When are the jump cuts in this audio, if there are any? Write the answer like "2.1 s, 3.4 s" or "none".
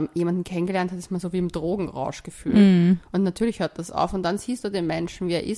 none

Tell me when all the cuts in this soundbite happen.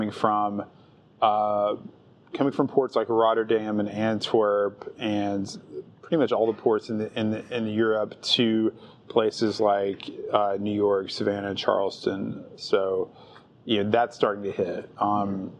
none

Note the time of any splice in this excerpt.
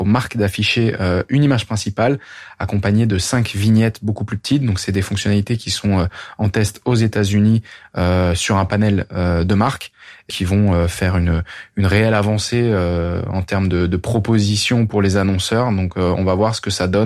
10.3 s

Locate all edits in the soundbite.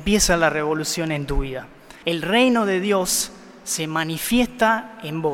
2.0 s

